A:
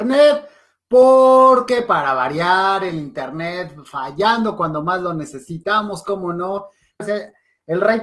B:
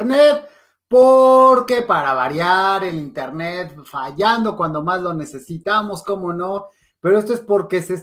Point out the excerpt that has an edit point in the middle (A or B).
A